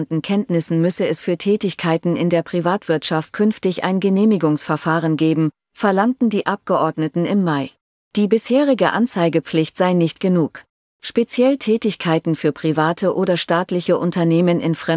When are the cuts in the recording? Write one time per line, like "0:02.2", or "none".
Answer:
none